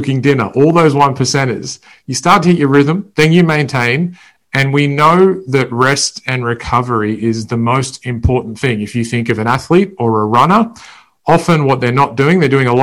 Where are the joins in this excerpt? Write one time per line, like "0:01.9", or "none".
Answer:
0:04.4